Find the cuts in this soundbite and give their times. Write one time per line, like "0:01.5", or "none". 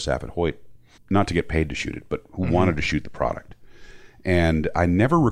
0:01.0